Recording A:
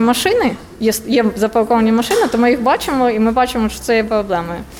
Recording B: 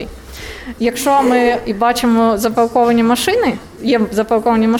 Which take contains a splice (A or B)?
B